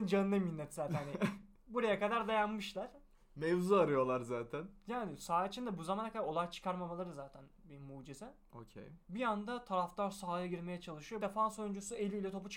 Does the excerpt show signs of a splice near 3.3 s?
no; 2 cuts; at 9.0 s, 11.2 s

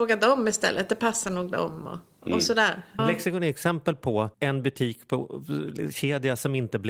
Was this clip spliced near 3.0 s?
yes; 2 cuts; at 3.0 s, 4.3 s

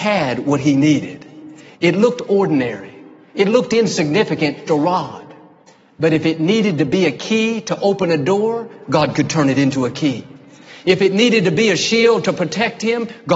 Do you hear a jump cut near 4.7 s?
yes; 1 cut; at 4.7 s

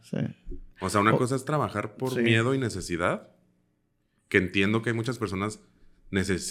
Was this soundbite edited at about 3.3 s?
no; 0 cuts

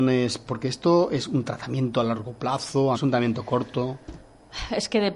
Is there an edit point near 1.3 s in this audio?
no; 1 cut; at 2.9 s

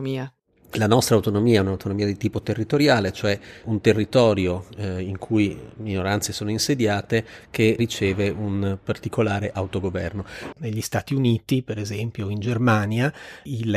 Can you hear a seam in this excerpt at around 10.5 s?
yes; 1 cut; at 10.5 s

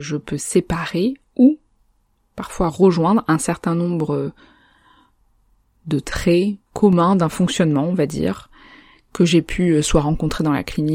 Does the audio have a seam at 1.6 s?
no; 1 cut; at 6.6 s

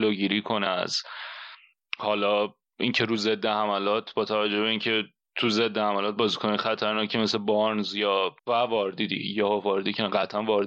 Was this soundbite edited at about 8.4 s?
yes; 1 cut; at 8.4 s

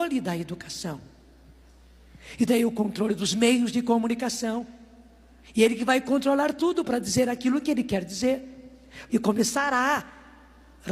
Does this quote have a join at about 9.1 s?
yes; 1 cut; at 9.1 s

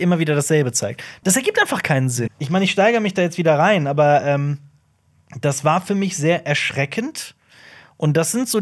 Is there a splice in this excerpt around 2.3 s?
yes; 2 cuts; at 1.2 s, 2.3 s

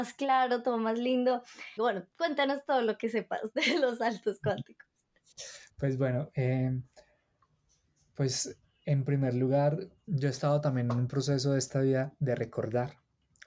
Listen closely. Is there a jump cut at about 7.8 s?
no; 2 cuts; at 1.8 s, 10.1 s

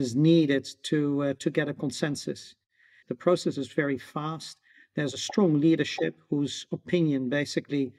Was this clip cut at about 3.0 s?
yes; 1 cut; at 3.0 s

